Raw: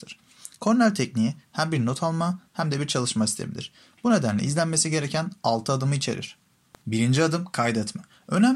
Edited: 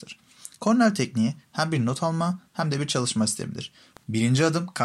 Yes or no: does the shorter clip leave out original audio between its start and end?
yes